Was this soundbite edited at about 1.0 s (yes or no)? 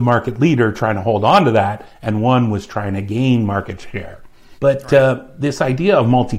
no